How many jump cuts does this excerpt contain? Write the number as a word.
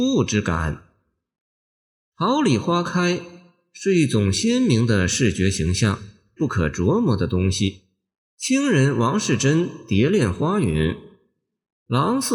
two